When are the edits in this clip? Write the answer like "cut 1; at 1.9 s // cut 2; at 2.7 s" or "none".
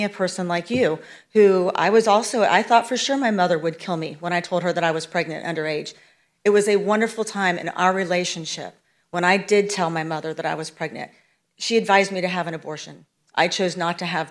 none